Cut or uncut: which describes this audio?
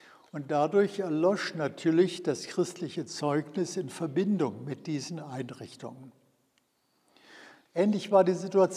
cut